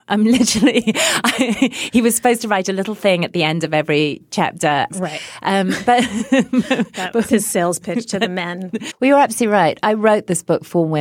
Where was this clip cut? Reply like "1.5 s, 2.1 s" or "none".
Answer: 4.9 s, 8.9 s